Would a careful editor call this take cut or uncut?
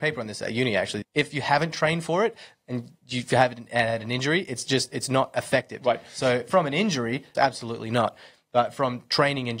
cut